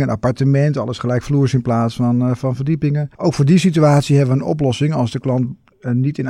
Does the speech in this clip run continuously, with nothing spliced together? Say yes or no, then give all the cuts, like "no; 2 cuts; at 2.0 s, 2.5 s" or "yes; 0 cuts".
no; 1 cut; at 3.1 s